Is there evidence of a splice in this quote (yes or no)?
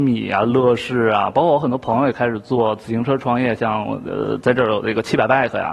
no